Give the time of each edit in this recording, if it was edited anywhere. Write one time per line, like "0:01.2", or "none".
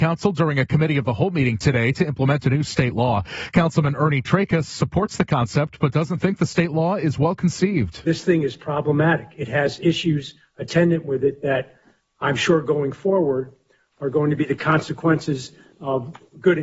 none

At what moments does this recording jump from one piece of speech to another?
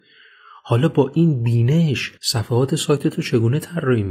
0:02.2

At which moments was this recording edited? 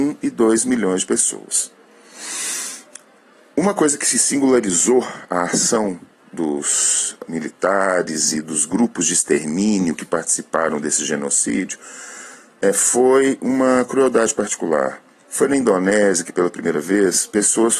0:15.2

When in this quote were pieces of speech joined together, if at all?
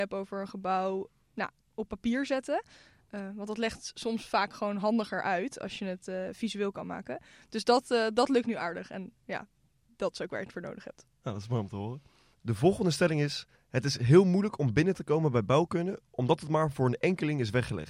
none

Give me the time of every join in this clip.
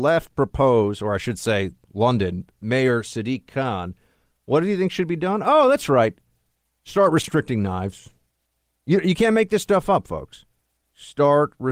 none

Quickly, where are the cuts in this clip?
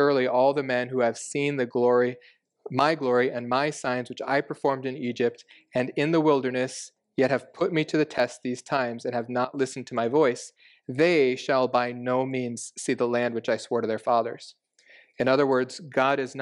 none

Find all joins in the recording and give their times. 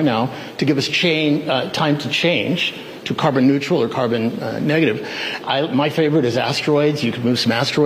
0:05.4

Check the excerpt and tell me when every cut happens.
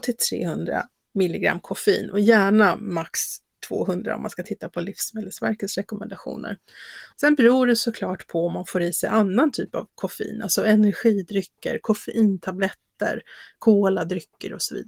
0:07.1

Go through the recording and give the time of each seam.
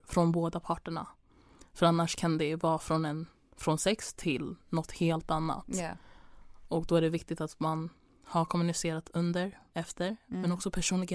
0:09.7

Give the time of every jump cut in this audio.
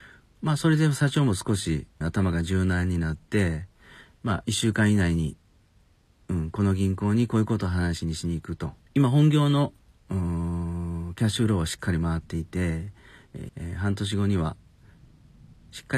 0:02.0
0:08.9
0:13.5

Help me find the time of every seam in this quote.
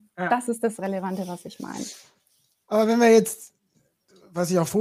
none

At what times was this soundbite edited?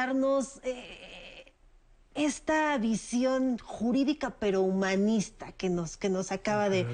none

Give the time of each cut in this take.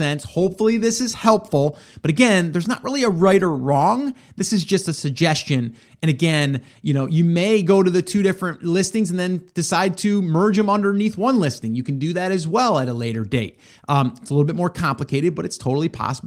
none

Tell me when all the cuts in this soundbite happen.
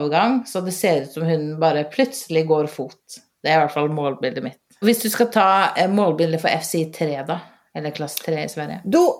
0:04.8

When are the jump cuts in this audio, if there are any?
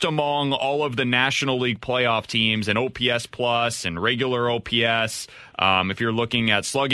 none

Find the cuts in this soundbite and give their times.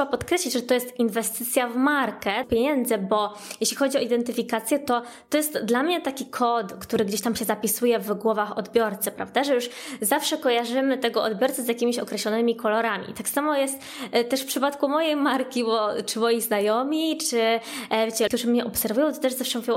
0:02.4
0:18.3

